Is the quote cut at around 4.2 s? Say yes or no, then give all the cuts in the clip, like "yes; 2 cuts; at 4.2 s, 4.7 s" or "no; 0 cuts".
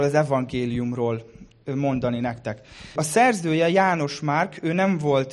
no; 1 cut; at 3.0 s